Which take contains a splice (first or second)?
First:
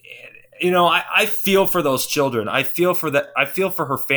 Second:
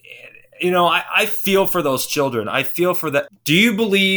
second